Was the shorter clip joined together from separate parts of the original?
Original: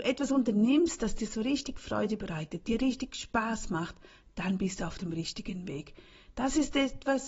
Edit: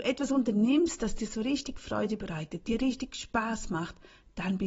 no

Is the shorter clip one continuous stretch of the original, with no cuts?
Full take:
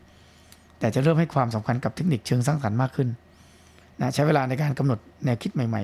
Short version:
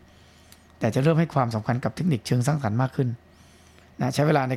yes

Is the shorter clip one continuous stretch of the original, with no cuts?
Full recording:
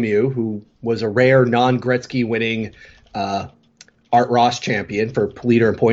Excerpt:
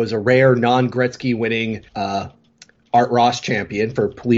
no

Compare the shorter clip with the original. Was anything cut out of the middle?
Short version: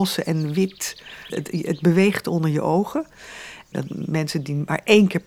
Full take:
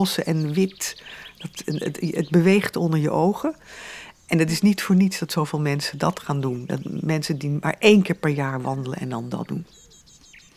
yes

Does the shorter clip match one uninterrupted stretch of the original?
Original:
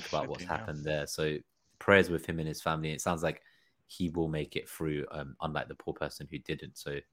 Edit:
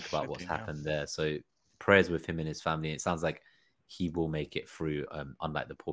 yes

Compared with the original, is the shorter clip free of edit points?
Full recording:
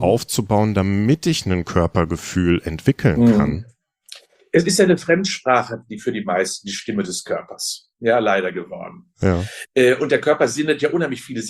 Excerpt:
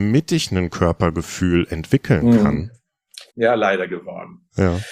no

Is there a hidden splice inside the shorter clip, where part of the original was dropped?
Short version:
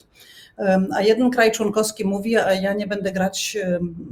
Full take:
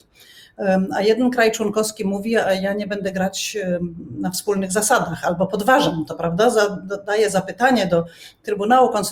no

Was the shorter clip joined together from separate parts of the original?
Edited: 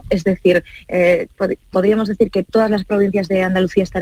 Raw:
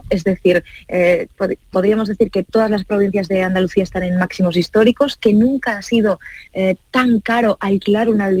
no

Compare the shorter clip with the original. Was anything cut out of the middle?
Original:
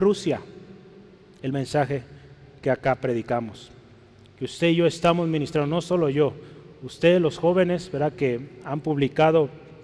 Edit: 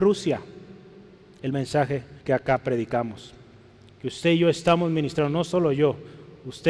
yes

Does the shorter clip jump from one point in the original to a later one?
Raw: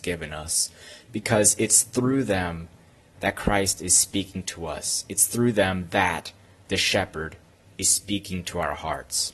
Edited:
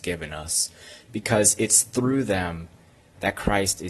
no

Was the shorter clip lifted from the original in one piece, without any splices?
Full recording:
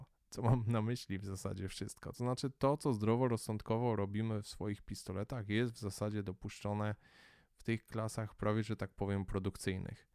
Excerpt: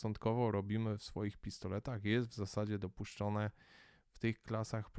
yes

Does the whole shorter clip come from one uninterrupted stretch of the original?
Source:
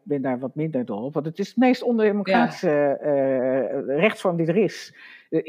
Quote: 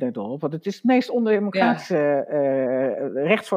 yes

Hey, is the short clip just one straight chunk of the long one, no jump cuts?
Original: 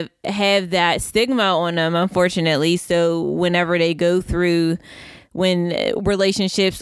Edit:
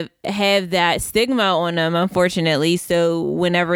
yes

